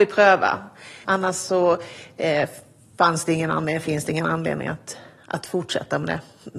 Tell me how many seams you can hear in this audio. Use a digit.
1